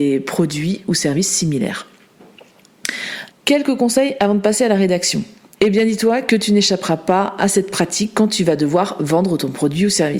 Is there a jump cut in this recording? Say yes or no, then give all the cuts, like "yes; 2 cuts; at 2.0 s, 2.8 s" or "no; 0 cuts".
yes; 2 cuts; at 3.3 s, 5.6 s